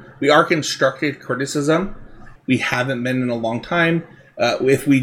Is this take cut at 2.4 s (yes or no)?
yes